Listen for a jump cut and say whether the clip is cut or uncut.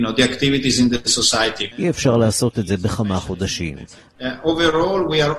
cut